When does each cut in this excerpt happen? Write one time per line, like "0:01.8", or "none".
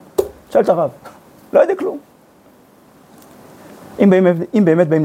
0:01.2